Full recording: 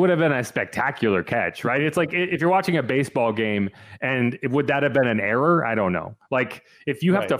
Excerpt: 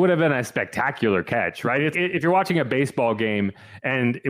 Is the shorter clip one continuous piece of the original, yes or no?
no